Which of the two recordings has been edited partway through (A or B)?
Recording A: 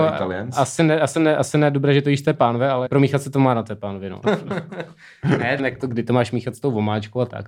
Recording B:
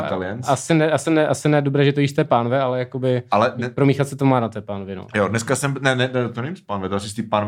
A